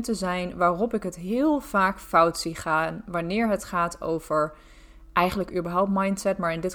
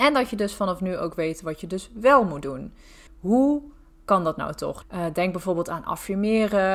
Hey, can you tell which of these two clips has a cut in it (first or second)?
second